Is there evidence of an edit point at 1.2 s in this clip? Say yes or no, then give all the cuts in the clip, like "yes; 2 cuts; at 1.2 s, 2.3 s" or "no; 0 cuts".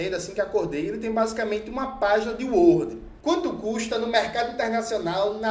no; 1 cut; at 3.2 s